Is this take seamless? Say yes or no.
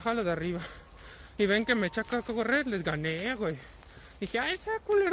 yes